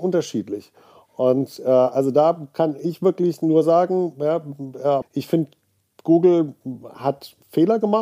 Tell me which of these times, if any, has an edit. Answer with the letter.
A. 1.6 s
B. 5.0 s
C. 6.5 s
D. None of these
B